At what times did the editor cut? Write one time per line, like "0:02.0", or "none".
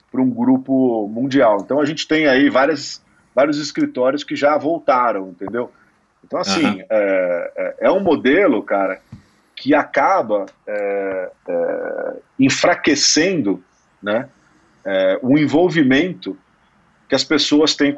0:11.4